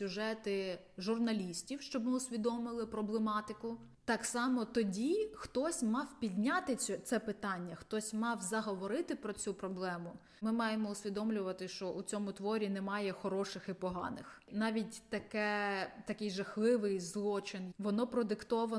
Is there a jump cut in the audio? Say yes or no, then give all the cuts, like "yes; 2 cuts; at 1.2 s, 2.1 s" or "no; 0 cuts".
yes; 1 cut; at 17.7 s